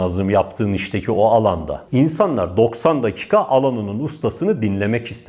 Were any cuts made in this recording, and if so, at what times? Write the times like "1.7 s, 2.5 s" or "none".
none